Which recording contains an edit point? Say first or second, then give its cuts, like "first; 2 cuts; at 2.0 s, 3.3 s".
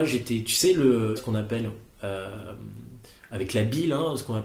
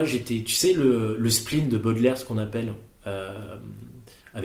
first; 1 cut; at 1.2 s